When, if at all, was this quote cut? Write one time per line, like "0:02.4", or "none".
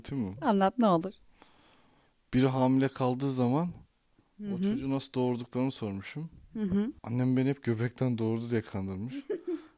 0:07.0

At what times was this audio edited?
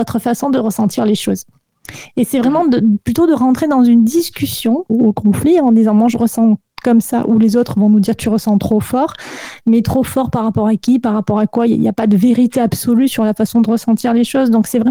0:04.9

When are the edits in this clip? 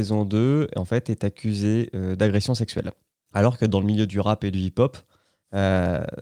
0:03.3

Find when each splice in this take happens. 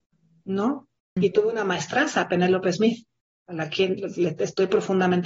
0:01.2

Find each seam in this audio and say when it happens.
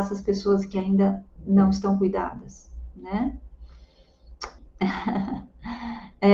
0:04.6

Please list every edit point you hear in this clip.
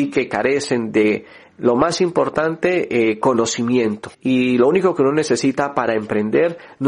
0:04.1

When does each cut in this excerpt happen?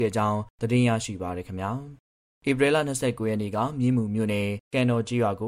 none

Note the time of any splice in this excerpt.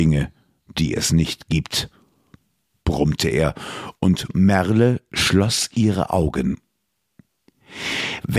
none

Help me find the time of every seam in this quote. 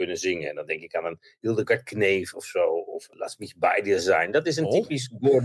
none

